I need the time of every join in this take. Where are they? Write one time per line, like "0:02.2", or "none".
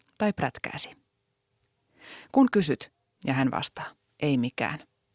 0:03.2